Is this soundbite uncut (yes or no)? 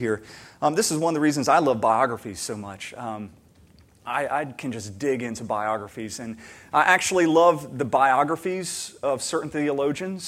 yes